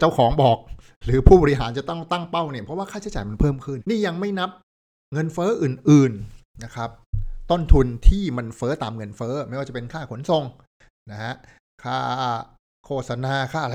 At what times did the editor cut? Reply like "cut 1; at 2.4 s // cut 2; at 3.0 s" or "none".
cut 1; at 3.8 s